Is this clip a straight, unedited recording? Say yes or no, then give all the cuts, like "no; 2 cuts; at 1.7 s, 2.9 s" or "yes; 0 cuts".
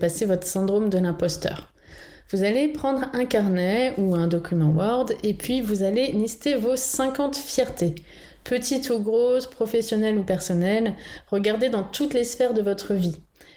yes; 0 cuts